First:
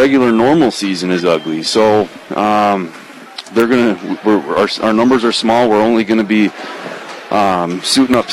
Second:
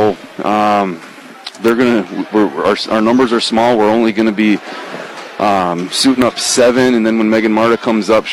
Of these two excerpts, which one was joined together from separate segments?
first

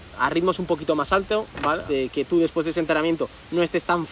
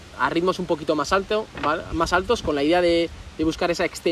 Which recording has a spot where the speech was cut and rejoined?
first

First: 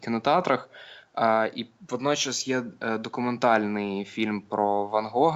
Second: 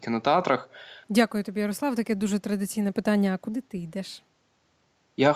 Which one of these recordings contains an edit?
second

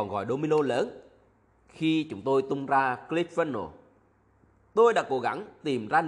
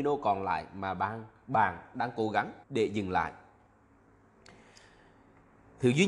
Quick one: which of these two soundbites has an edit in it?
second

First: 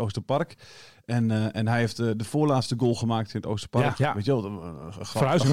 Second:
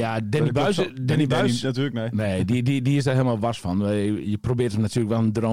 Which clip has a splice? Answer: first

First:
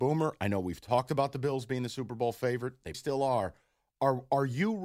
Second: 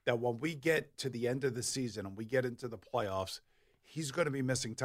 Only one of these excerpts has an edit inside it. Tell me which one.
first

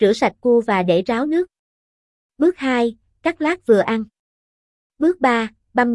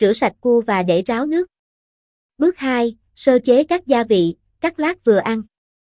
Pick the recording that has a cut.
first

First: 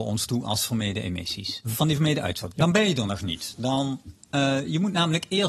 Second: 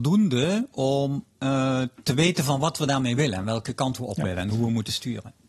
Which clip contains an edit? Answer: first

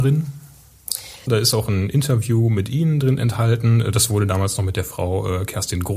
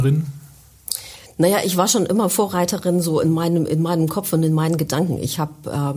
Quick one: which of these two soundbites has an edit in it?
first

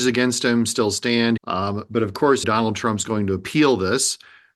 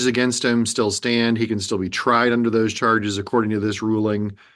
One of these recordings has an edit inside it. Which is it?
first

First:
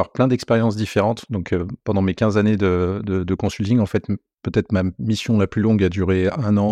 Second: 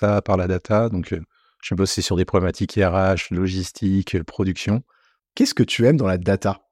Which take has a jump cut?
second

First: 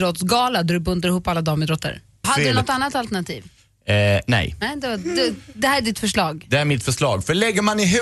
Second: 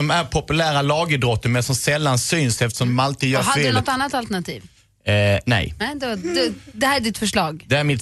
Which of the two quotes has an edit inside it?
first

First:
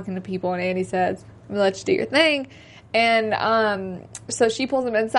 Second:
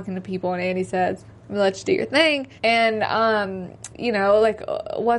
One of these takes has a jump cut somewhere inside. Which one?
second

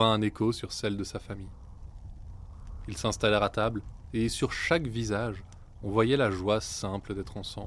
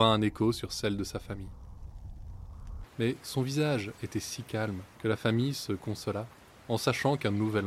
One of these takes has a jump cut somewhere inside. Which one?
second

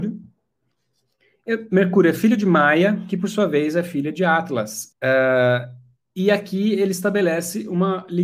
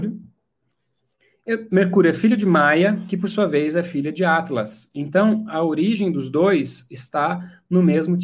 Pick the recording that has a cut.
first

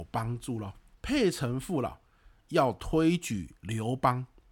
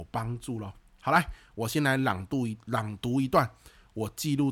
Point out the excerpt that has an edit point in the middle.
first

